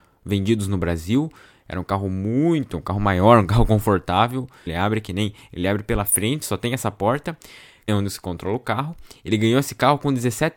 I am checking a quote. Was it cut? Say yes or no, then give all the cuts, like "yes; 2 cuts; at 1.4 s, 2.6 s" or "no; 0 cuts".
yes; 2 cuts; at 4.7 s, 7.9 s